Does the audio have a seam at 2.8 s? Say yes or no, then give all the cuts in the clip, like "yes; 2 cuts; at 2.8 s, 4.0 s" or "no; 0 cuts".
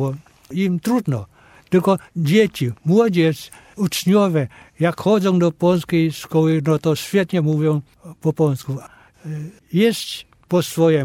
no; 1 cut; at 9.6 s